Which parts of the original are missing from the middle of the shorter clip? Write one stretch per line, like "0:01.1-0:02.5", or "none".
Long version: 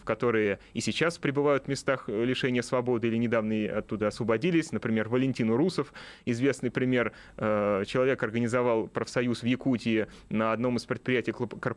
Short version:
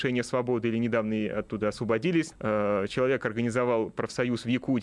0:04.7-0:07.3